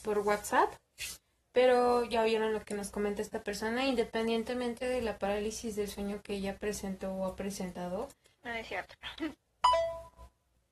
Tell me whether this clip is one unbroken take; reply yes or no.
no